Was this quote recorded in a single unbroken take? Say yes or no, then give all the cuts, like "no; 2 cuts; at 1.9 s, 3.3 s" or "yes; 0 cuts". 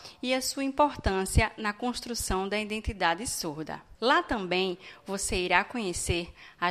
no; 1 cut; at 3.9 s